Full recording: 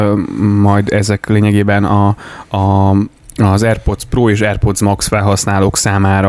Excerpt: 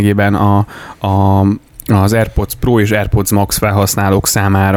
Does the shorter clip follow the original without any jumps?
yes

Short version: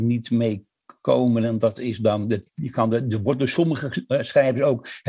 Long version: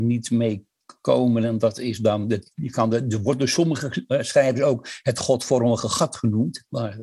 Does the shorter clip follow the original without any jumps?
yes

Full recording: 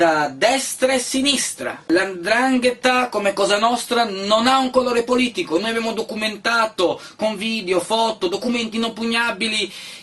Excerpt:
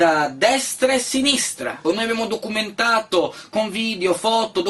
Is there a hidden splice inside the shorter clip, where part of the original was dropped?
yes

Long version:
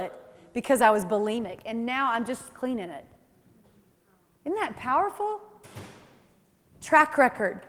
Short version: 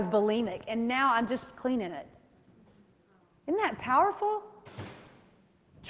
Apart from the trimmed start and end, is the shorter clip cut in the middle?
no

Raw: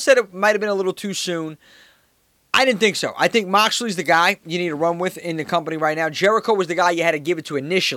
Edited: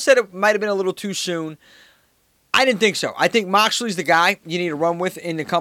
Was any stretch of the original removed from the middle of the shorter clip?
no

